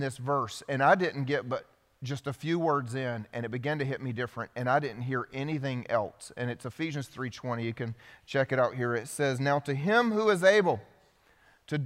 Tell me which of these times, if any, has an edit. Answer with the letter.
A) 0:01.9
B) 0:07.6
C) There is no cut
C